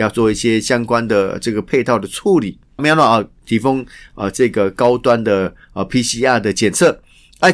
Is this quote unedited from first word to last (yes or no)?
no